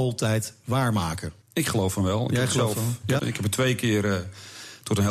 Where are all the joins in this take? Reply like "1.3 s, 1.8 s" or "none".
1.4 s, 3.2 s